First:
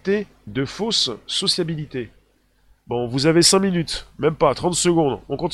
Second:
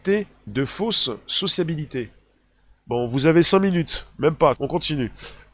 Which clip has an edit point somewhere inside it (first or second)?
second